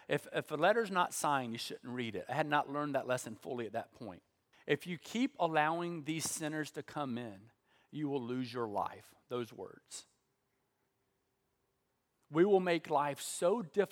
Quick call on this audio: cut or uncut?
cut